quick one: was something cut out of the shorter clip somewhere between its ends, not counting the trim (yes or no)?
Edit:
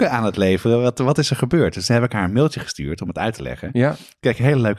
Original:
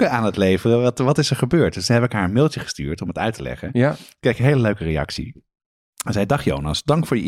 no